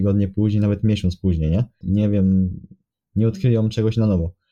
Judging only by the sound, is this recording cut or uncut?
cut